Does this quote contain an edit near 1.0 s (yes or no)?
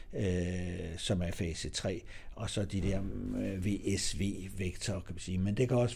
no